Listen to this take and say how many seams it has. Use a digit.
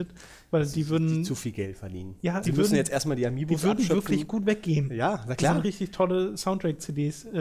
2